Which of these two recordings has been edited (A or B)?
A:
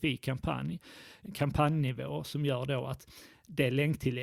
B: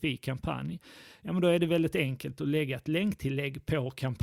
A